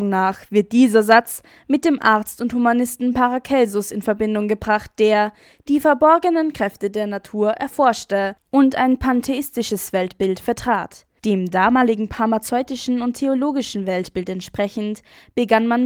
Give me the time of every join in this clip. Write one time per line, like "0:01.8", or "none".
0:11.2

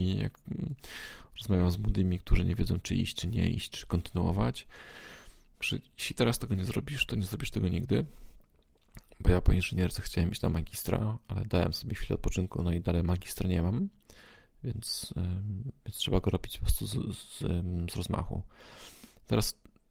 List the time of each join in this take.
0:05.6

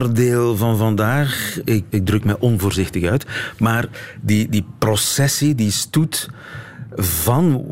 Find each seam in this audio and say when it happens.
0:01.9

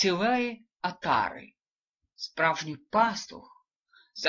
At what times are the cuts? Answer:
none

